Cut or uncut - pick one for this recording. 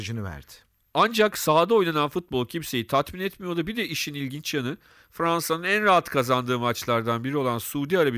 uncut